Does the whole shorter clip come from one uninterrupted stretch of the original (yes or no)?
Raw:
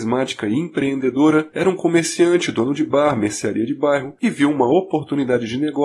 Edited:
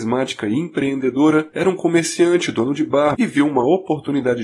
no